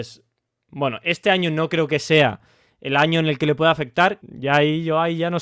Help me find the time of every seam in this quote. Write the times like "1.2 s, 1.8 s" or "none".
4.2 s